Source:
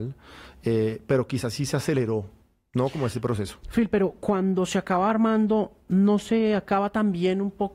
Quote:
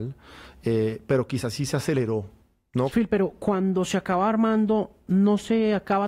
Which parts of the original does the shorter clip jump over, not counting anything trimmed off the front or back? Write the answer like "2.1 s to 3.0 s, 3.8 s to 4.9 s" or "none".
2.9 s to 3.7 s